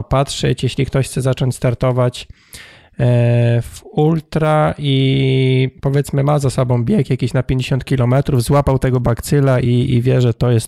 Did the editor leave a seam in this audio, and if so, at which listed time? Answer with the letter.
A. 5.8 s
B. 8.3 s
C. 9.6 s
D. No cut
A